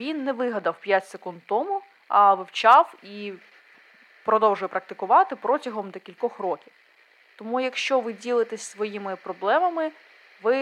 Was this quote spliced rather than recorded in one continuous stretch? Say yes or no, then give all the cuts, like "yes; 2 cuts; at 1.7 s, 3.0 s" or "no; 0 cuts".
no; 0 cuts